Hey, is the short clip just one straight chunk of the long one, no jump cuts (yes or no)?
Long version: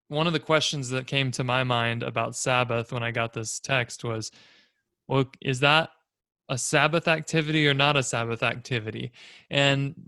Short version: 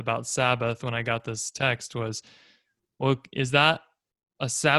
yes